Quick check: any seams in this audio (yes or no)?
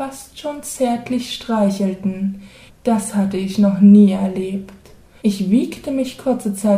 yes